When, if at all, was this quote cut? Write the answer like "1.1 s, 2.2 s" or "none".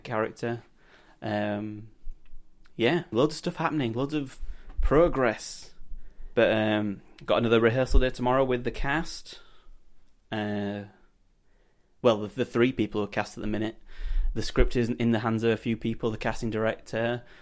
3.1 s, 6.4 s